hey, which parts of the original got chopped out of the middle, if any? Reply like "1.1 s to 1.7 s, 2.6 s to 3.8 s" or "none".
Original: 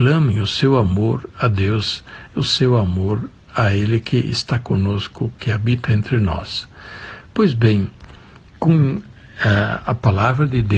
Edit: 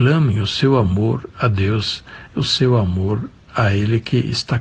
none